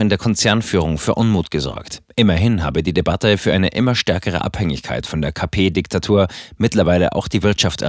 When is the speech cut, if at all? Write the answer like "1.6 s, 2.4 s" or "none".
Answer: none